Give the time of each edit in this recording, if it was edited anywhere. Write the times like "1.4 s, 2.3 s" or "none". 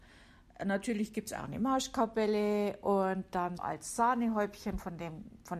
3.6 s